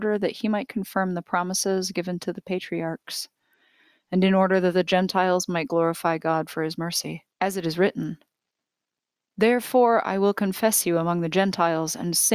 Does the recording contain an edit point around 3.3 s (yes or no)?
no